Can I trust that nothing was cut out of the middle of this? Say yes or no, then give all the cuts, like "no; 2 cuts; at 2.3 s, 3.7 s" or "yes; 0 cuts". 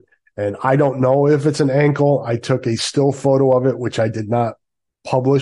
yes; 0 cuts